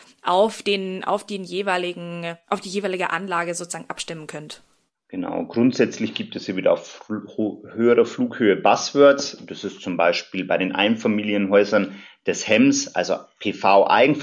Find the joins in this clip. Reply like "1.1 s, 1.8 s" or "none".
none